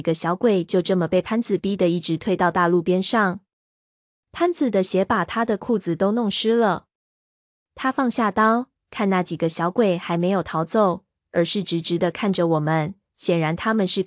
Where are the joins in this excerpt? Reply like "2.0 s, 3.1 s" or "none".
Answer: none